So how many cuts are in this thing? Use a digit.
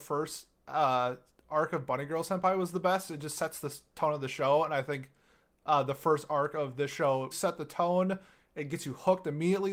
2